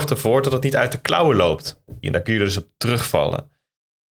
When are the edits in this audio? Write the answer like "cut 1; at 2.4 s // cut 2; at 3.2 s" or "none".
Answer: cut 1; at 2.0 s

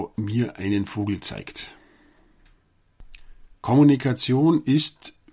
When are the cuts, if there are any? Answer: cut 1; at 3.5 s

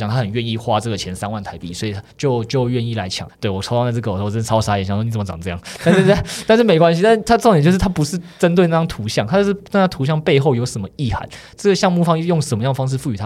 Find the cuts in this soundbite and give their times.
cut 1; at 2.1 s // cut 2; at 3.3 s

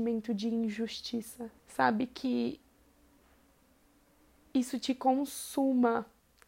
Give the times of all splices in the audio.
cut 1; at 1.6 s

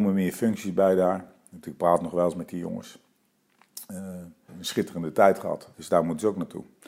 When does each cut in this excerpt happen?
cut 1; at 4.5 s // cut 2; at 5.7 s

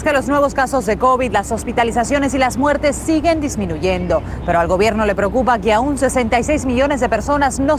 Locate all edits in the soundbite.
none

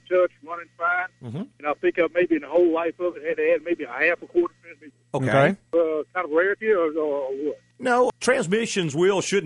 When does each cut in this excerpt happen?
none

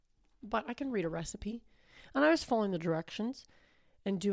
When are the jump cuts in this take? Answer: none

